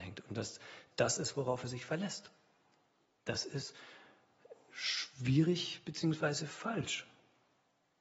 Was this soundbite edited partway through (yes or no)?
yes